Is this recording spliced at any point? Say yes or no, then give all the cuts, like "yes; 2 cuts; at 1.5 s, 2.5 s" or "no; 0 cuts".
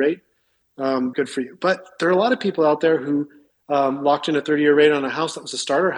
yes; 1 cut; at 1.1 s